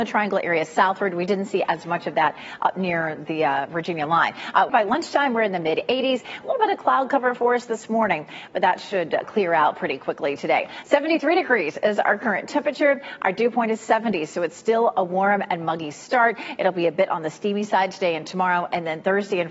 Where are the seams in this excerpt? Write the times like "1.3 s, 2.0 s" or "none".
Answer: 4.7 s, 6.4 s